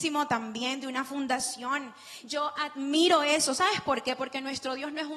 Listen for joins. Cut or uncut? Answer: uncut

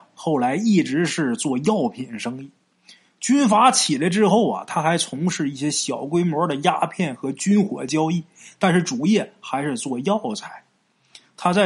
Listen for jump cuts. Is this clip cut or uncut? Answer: uncut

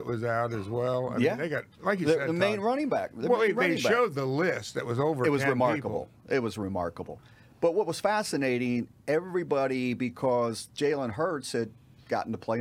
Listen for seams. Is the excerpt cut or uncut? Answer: uncut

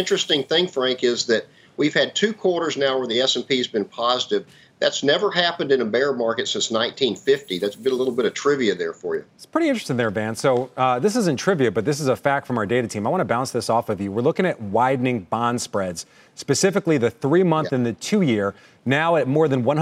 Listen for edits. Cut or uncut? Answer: cut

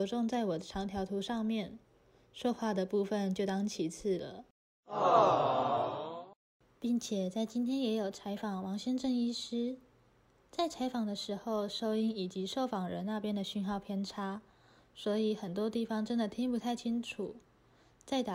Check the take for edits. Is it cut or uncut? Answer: uncut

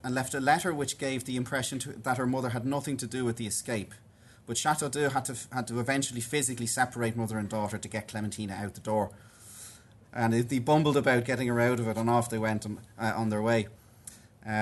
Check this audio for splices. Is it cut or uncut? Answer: cut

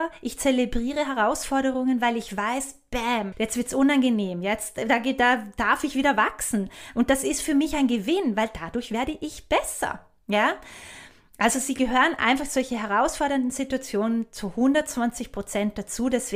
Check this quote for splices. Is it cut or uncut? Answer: cut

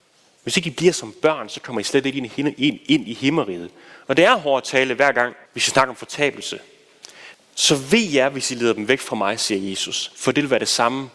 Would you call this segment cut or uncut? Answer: cut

